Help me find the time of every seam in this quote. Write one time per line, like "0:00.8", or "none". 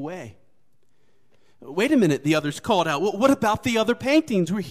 none

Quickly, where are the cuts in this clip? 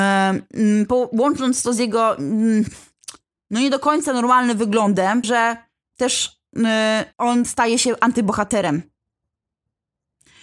0:05.2
0:07.1

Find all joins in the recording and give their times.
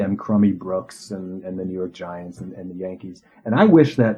none

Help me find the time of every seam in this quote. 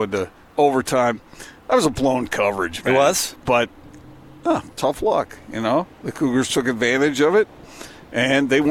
0:03.4

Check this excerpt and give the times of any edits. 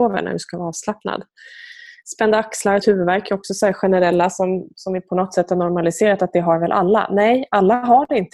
0:02.8

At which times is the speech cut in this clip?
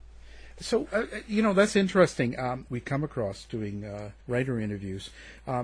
0:02.7
0:04.2

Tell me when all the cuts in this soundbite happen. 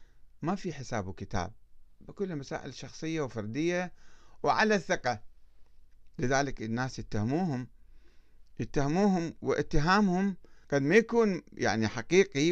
0:10.6

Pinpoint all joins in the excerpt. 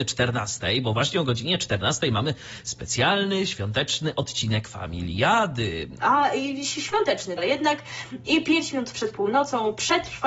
0:06.0
0:07.4

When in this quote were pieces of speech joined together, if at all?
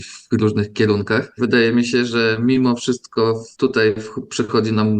0:01.4
0:03.5

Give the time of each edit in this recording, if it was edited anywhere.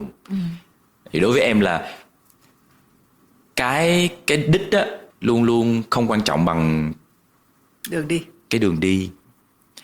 0:05.1

